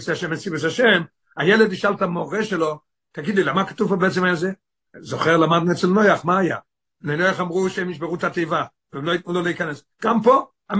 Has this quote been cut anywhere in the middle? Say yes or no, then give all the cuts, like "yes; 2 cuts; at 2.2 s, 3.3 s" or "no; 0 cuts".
no; 0 cuts